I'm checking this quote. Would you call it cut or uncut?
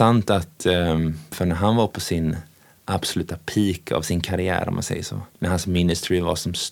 cut